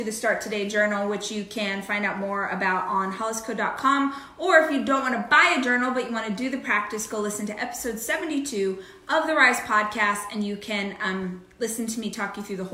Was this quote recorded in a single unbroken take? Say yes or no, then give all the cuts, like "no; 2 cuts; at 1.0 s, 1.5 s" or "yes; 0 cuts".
yes; 0 cuts